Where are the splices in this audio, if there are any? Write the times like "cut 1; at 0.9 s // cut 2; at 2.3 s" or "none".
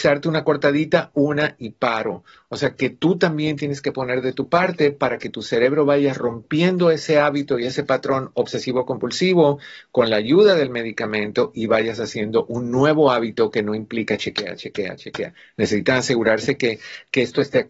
cut 1; at 15.5 s